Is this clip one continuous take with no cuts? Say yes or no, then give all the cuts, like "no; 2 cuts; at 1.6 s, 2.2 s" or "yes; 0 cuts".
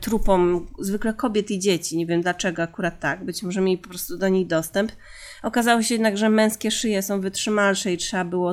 yes; 0 cuts